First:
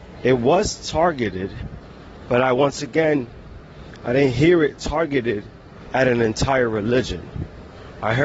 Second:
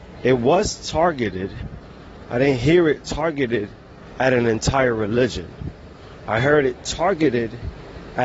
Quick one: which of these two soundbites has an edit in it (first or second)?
second